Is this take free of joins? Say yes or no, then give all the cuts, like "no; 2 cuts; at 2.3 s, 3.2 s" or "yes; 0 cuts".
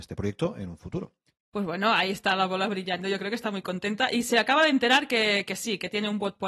yes; 0 cuts